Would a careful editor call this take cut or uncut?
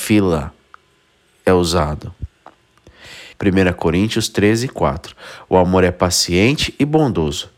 cut